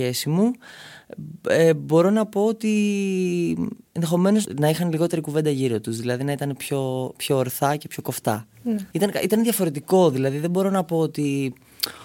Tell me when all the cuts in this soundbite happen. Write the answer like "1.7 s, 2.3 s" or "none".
8.9 s

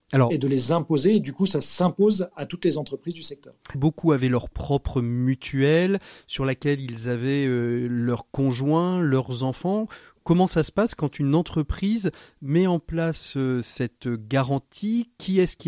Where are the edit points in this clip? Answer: 3.7 s

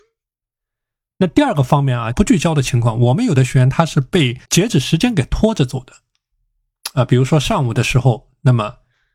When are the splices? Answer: 2.1 s, 4.4 s

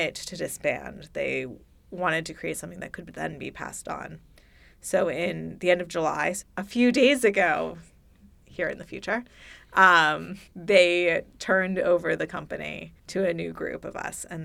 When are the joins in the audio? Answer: 6.4 s, 10.5 s, 13.0 s

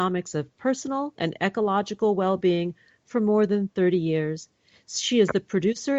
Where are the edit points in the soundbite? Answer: 1.2 s

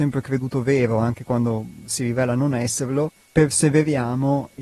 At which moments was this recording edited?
3.3 s

